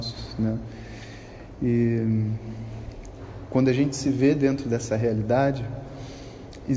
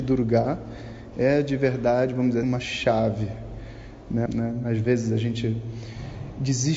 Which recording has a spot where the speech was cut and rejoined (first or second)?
second